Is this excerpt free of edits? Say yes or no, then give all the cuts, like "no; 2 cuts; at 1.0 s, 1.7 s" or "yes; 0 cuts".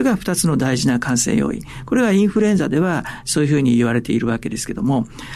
yes; 0 cuts